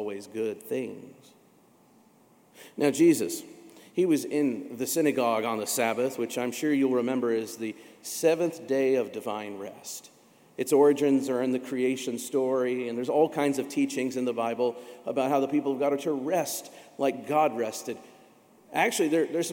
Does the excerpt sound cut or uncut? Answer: uncut